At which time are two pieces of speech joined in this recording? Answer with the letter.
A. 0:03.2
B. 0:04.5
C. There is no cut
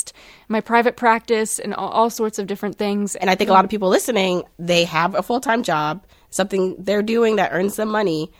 A